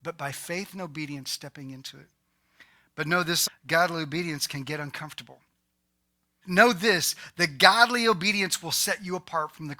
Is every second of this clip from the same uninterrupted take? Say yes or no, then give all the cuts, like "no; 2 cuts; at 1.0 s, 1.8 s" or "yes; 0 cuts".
no; 2 cuts; at 3.5 s, 6.4 s